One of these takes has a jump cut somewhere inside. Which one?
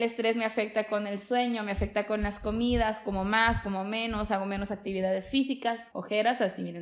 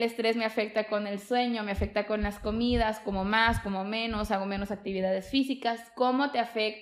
first; 1 cut; at 5.9 s

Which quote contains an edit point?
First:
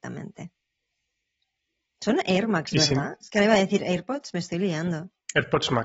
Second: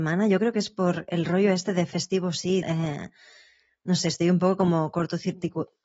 second; 1 cut; at 2.6 s

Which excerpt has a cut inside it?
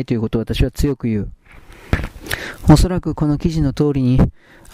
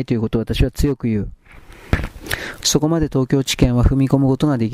second; 1 cut; at 2.6 s

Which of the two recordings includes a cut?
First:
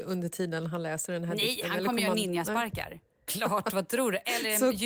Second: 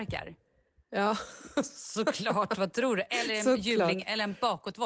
first; 1 cut; at 3.3 s

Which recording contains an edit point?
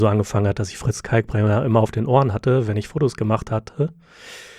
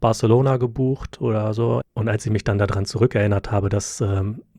second; 1 cut; at 1.8 s

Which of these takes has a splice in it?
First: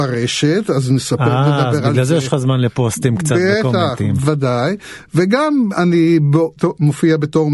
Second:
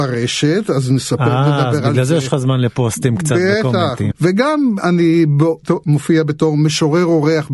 second; 1 cut; at 4.1 s

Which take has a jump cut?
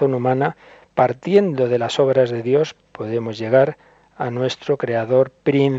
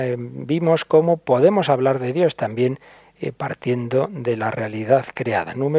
first; 1 cut; at 2.8 s

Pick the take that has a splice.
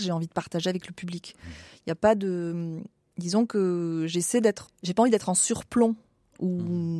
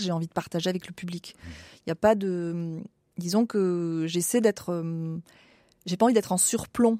first; 1 cut; at 4.7 s

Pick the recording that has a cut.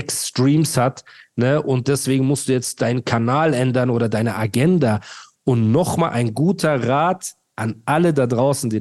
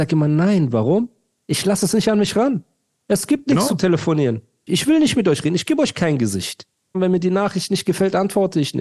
second; 2 cuts; at 4.7 s, 6.9 s

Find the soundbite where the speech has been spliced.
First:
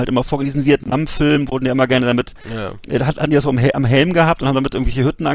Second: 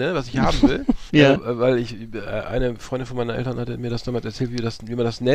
second; 1 cut; at 1.1 s

